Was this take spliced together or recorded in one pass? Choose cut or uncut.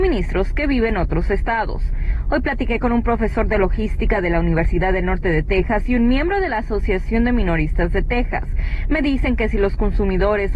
uncut